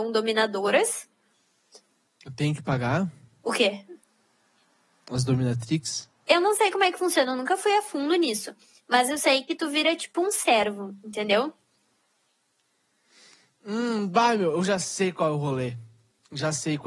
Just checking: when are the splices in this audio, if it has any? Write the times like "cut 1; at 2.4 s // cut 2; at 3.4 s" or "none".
none